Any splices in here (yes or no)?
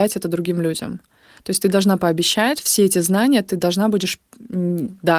yes